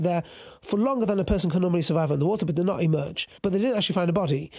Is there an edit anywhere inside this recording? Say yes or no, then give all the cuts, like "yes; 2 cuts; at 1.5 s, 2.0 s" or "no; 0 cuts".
yes; 1 cut; at 3.4 s